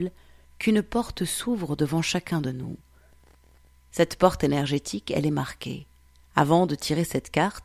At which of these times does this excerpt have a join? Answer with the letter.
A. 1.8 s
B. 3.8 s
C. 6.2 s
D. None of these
C